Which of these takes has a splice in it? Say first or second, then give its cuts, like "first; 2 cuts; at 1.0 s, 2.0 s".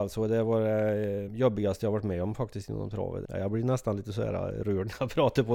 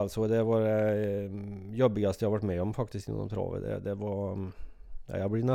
first; 2 cuts; at 1.3 s, 3.3 s